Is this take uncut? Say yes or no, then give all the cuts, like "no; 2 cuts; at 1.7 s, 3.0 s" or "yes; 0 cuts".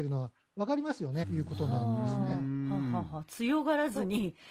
no; 1 cut; at 1.2 s